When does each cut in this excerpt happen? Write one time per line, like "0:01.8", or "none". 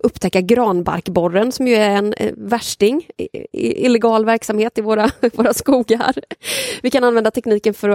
none